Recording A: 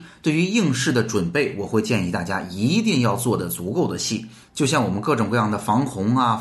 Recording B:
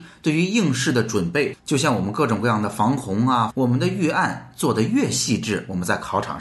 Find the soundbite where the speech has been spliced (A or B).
B